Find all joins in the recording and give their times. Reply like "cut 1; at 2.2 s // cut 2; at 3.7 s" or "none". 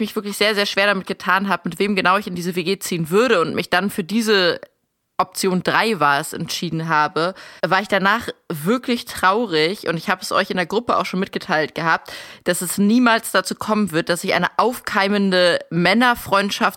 cut 1; at 7.6 s